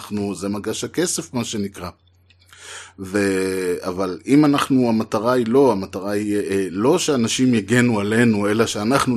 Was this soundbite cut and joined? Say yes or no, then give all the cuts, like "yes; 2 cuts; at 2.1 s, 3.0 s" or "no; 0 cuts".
no; 0 cuts